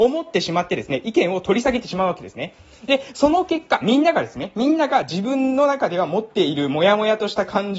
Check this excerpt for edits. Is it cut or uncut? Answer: uncut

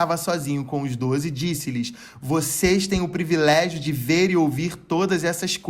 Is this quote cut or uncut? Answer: uncut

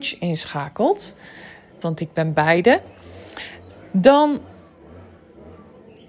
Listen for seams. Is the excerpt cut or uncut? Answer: cut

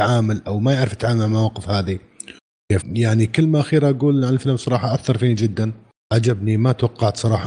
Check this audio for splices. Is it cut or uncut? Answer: cut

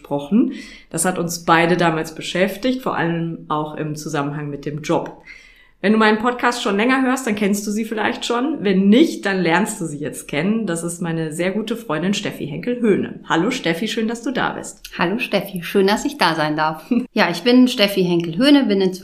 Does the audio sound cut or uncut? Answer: cut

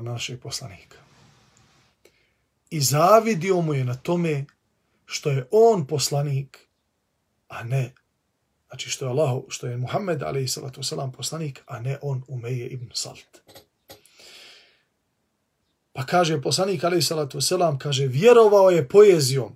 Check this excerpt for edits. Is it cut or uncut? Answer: uncut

